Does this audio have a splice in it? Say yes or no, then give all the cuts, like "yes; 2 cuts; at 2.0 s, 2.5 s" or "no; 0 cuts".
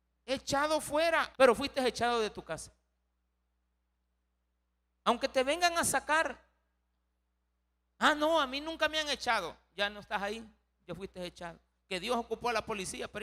yes; 1 cut; at 1.3 s